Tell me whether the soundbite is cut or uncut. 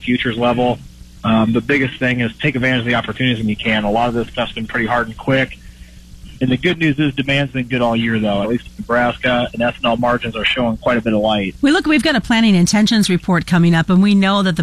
cut